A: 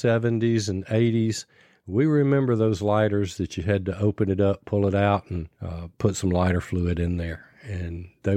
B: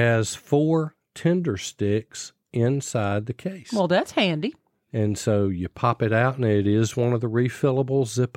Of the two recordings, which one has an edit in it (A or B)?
A